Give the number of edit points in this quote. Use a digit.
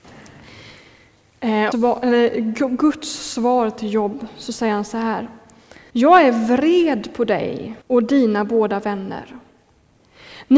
3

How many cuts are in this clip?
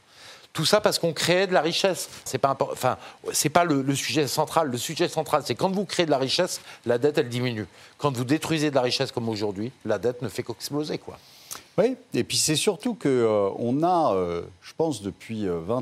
1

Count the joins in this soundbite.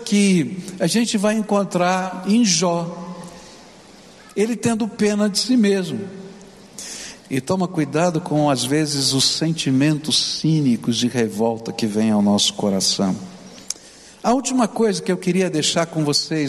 1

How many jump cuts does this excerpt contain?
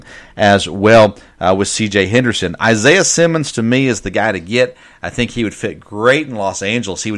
0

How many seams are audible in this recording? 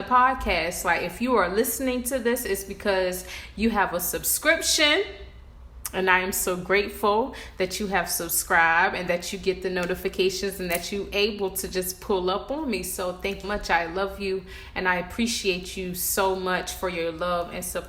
1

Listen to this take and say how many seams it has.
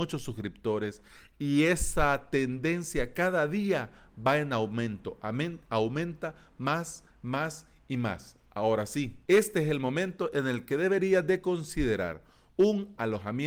2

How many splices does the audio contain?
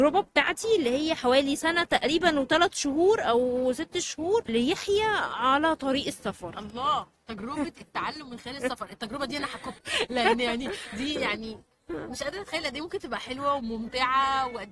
1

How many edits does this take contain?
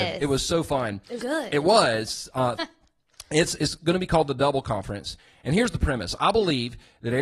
3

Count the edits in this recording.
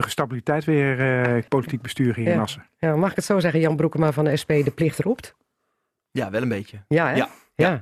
1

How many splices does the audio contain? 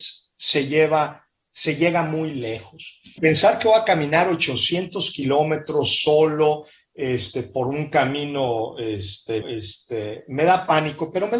2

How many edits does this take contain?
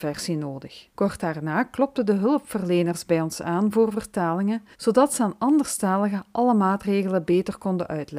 2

